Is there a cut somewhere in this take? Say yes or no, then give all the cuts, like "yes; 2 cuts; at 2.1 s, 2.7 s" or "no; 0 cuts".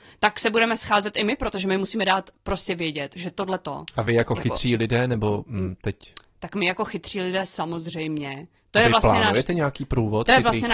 no; 0 cuts